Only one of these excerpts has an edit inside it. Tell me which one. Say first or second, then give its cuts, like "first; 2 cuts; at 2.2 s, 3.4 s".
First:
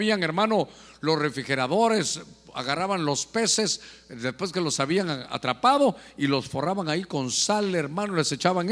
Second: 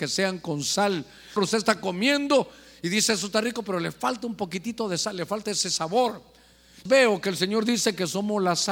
second; 2 cuts; at 1.4 s, 6.9 s